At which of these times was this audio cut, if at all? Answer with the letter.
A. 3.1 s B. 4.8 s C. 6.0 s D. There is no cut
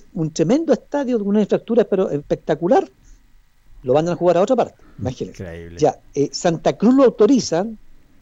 B